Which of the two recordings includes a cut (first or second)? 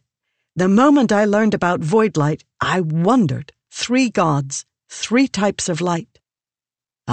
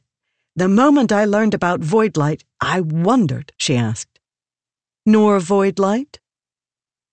second